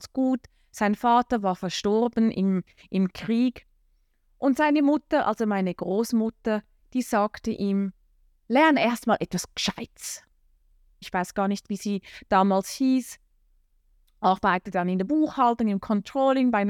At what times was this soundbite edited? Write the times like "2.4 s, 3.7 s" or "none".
11.0 s